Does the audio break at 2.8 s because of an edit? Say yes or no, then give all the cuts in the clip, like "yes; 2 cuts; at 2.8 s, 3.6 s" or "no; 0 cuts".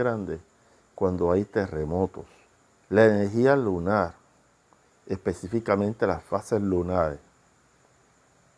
yes; 1 cut; at 2.8 s